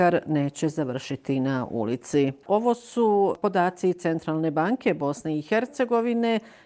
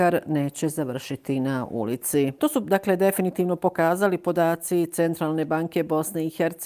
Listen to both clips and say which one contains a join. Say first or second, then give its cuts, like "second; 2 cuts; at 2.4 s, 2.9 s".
second; 1 cut; at 2.4 s